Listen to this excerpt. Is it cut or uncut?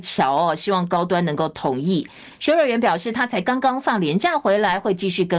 uncut